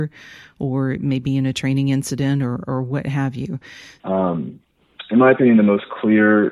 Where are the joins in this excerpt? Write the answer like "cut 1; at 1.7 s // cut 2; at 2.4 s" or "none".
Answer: cut 1; at 4.0 s